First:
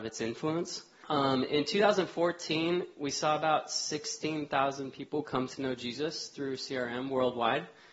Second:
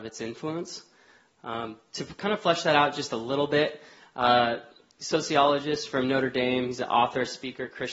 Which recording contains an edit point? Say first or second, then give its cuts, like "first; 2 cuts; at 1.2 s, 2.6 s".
first; 1 cut; at 1.0 s